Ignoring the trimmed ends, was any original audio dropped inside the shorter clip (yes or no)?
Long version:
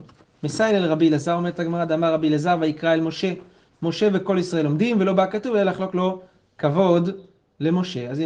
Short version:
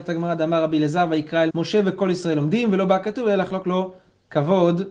yes